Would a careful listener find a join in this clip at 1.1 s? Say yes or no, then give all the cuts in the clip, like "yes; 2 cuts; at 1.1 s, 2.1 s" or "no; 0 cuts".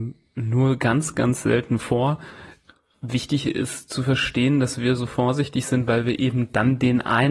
yes; 1 cut; at 1.1 s